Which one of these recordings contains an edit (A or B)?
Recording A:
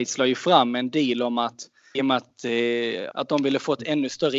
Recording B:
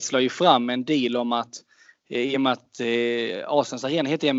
A